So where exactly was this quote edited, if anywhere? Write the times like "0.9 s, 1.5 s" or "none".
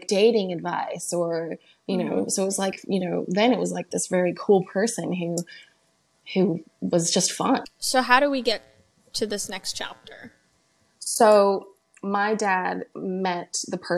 none

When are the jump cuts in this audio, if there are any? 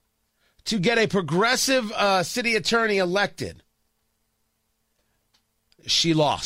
none

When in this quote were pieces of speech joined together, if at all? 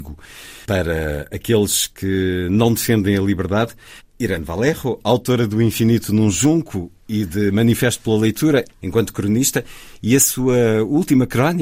4.0 s, 8.8 s

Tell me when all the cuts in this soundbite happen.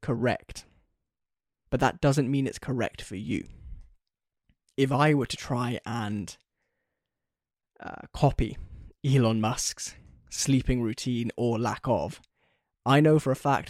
none

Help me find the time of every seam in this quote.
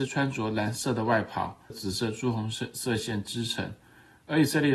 1.7 s

